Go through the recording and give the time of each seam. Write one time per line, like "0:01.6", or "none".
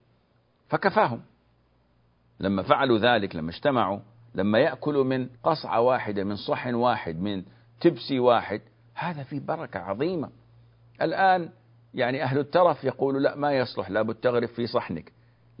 0:05.3